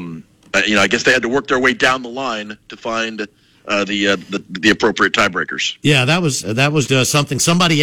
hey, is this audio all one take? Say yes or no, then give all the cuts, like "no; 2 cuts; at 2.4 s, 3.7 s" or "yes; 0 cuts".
no; 1 cut; at 6.9 s